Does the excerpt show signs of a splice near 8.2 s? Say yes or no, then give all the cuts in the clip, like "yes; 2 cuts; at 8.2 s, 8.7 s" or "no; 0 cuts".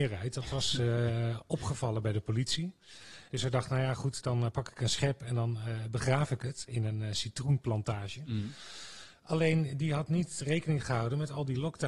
no; 1 cut; at 3.3 s